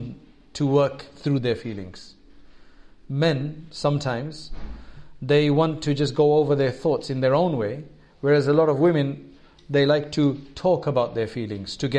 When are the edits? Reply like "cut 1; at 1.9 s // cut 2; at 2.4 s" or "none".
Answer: none

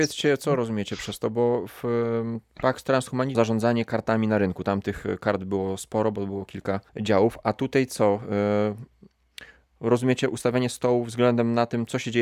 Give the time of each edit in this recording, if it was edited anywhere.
cut 1; at 3.3 s // cut 2; at 6.9 s

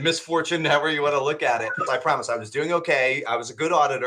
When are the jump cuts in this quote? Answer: cut 1; at 1.9 s

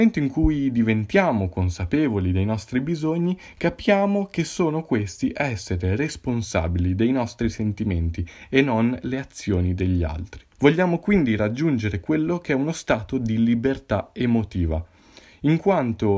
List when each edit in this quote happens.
cut 1; at 10.5 s

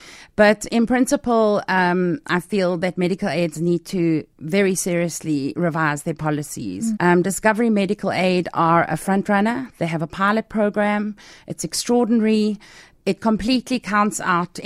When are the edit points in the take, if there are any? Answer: cut 1; at 6.9 s

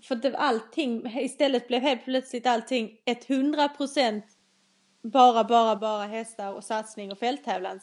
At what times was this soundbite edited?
cut 1; at 5.8 s

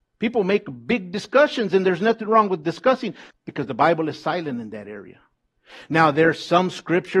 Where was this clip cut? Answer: cut 1; at 3.3 s

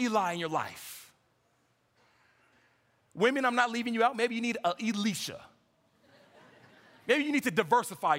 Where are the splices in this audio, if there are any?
none

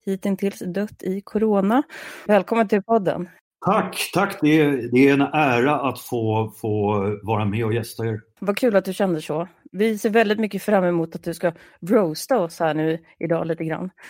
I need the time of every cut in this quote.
cut 1; at 2.3 s

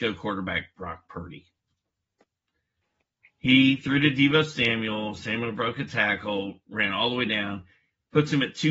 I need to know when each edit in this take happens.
none

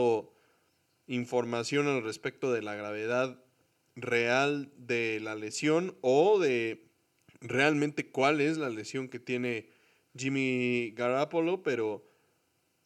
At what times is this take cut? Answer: none

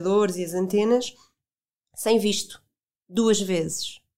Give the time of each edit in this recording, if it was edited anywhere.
cut 1; at 2.9 s

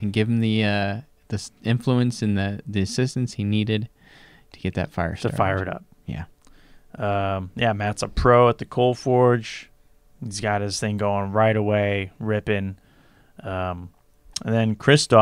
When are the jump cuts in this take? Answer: none

